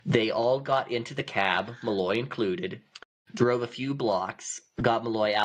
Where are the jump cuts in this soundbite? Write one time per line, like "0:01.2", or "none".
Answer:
none